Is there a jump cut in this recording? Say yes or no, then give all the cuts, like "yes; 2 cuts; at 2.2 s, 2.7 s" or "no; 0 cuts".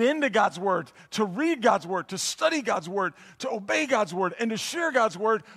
no; 0 cuts